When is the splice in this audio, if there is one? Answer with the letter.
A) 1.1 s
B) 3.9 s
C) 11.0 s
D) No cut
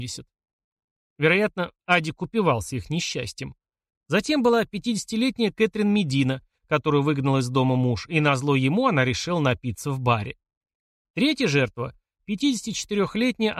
B